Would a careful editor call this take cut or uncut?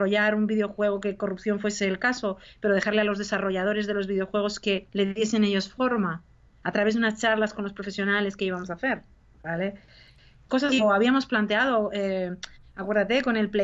cut